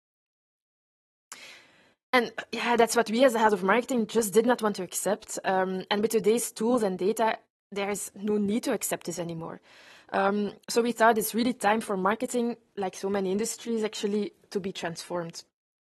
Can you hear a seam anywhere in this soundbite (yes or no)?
no